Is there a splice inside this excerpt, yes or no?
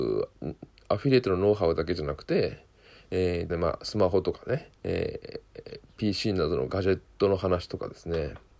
yes